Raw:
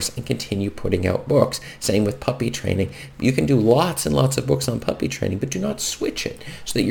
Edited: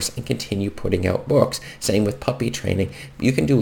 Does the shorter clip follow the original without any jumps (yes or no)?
yes